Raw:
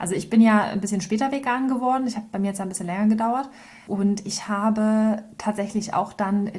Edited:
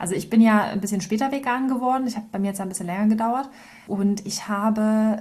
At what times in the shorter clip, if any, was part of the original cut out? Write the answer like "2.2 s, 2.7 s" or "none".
none